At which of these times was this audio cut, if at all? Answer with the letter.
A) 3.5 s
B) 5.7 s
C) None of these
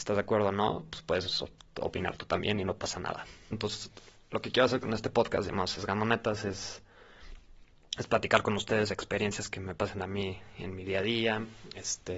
A